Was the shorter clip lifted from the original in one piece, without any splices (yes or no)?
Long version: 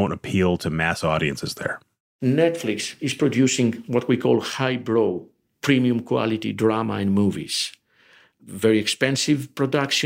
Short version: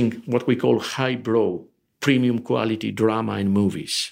yes